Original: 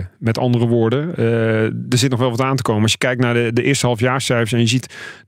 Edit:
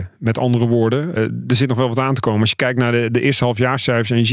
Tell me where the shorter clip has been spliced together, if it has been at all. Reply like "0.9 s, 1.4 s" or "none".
1.2 s